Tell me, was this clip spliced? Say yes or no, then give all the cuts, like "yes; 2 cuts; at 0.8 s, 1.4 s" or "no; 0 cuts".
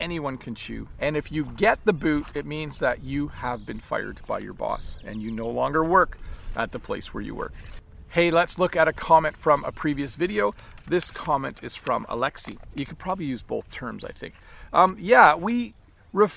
yes; 2 cuts; at 0.9 s, 12.7 s